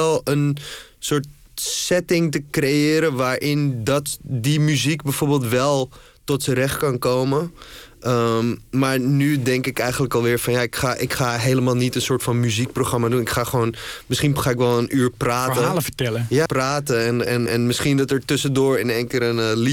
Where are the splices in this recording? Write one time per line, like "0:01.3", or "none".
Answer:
0:16.5
0:17.5